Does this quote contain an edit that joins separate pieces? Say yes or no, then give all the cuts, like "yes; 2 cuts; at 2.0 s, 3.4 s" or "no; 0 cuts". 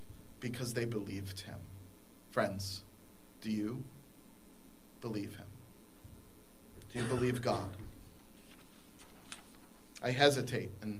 no; 0 cuts